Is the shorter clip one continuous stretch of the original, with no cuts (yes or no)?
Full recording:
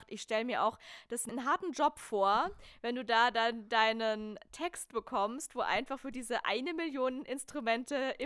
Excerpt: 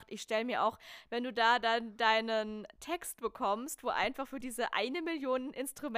no